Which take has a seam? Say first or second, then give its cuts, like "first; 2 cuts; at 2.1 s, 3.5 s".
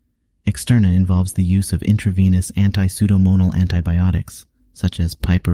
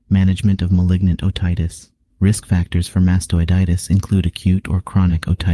second; 1 cut; at 2.1 s